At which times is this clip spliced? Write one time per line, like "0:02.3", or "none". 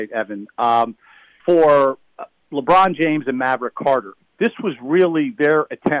0:01.4